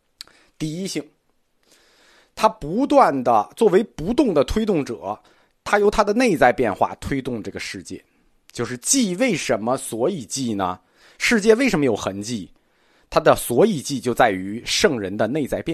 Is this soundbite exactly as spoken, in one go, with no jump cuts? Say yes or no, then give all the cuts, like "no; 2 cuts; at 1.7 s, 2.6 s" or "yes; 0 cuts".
yes; 0 cuts